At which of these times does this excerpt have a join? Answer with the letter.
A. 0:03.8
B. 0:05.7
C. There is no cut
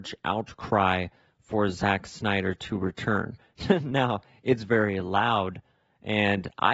C